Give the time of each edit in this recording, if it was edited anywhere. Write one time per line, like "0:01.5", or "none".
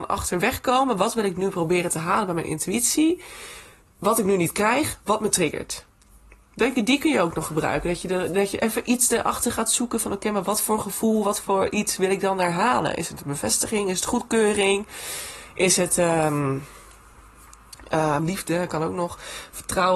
0:18.2